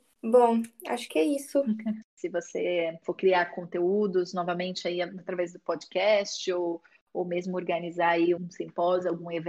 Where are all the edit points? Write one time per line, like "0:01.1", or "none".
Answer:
0:02.0
0:08.4